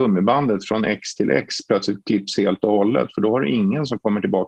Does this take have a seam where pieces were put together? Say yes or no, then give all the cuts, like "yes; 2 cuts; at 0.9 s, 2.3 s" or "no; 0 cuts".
no; 0 cuts